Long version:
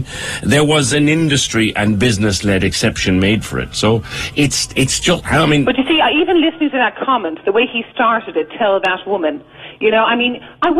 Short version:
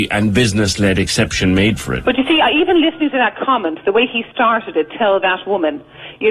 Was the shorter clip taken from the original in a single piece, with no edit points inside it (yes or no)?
no